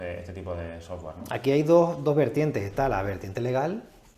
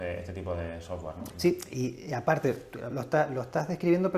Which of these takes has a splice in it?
second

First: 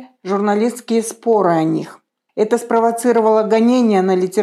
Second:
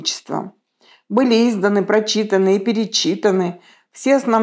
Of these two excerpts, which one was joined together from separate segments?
first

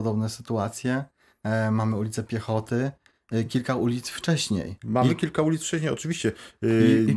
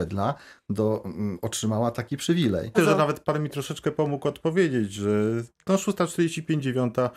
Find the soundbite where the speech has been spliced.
second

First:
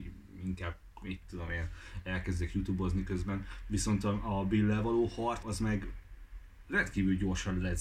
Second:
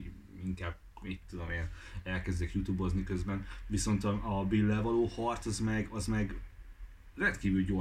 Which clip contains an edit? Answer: first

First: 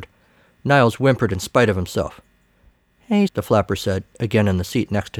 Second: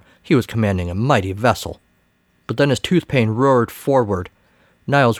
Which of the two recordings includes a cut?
first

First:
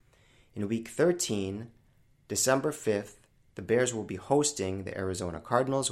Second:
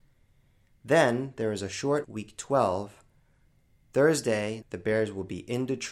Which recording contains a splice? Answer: second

